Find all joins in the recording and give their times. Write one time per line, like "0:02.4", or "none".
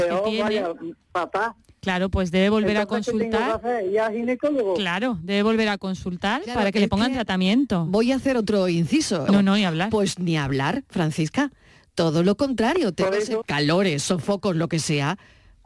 0:09.3
0:13.4